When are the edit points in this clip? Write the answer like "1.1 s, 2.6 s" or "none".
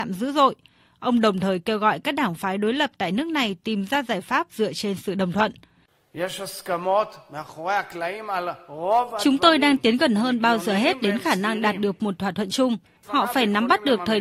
13.0 s